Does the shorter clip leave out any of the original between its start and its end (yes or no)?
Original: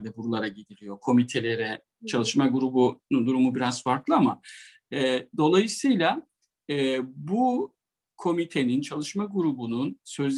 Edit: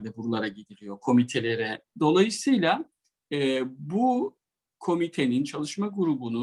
yes